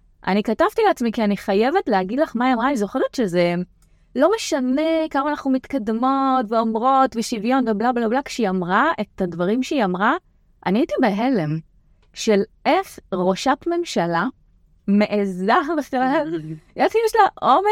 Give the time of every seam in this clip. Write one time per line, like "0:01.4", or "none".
none